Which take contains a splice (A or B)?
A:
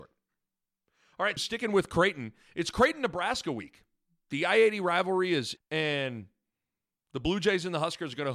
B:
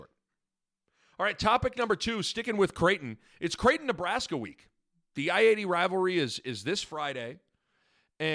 A